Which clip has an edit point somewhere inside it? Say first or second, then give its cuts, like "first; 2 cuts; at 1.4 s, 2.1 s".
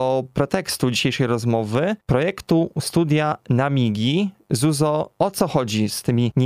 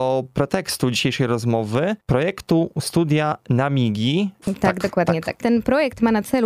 second; 1 cut; at 4.4 s